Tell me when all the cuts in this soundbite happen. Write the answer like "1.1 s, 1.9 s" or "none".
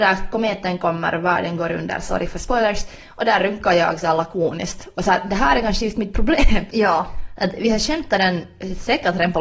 6.7 s